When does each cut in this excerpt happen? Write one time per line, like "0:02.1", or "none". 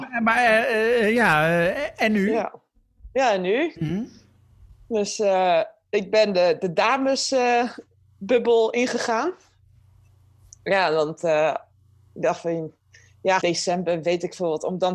0:03.7
0:13.4